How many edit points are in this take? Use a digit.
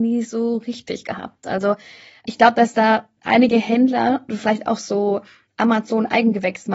1